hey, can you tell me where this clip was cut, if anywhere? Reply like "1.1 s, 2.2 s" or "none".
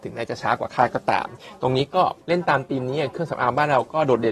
2.2 s